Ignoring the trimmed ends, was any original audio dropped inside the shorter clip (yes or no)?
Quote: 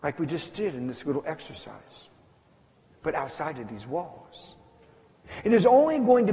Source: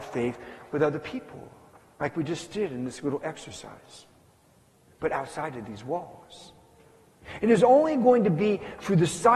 no